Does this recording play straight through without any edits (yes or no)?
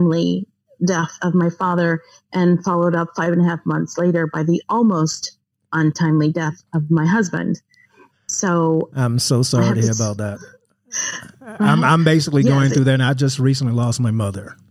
no